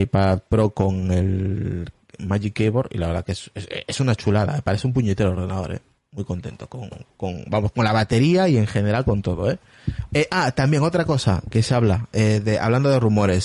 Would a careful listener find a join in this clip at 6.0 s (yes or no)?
no